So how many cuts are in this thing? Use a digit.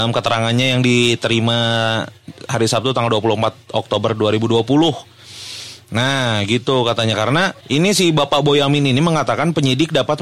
1